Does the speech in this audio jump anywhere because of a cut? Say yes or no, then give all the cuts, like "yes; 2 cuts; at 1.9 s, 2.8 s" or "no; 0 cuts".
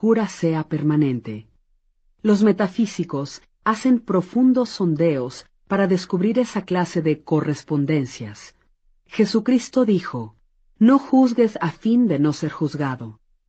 no; 0 cuts